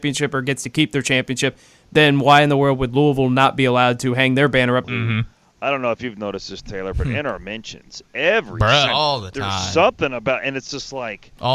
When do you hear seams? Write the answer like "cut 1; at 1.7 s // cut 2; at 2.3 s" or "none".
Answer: cut 1; at 4.8 s // cut 2; at 8.9 s